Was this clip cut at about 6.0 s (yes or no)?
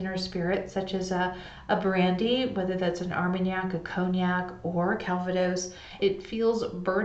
yes